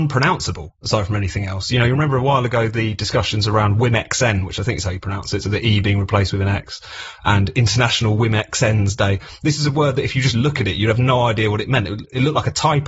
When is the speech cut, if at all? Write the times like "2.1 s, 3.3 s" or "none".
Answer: none